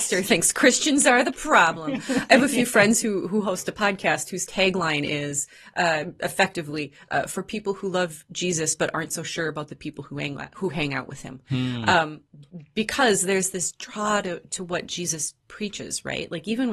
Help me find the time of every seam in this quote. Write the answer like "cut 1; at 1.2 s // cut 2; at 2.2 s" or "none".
none